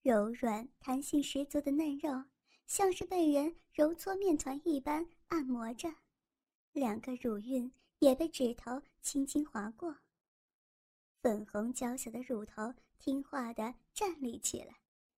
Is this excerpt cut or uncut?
uncut